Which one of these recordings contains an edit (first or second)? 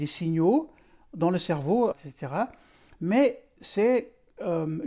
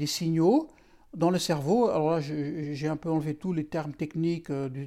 first